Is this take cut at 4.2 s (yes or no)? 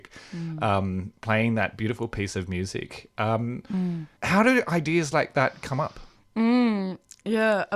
yes